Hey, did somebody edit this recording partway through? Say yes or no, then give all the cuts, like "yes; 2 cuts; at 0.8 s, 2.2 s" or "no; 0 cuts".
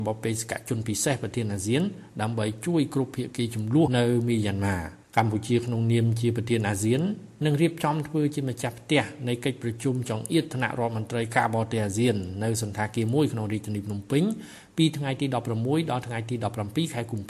yes; 2 cuts; at 3.9 s, 5.0 s